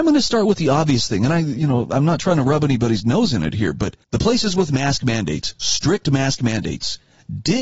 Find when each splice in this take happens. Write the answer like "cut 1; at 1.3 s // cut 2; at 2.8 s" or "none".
cut 1; at 4.0 s